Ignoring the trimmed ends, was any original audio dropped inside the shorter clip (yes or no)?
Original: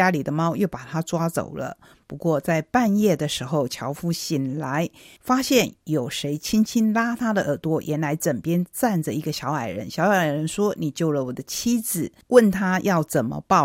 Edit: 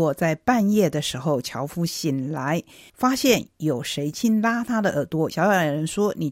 yes